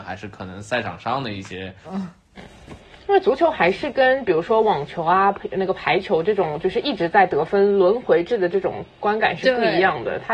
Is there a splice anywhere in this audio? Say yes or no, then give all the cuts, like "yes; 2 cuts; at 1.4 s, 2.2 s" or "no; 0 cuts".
yes; 1 cut; at 1.8 s